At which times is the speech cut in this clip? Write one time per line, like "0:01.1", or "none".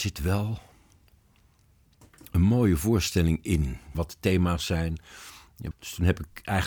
0:03.9
0:05.7